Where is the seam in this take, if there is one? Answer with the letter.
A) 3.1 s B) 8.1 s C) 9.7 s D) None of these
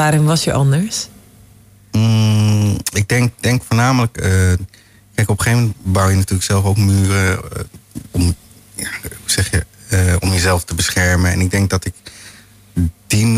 B